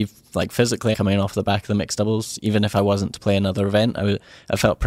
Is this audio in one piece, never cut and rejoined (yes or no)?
no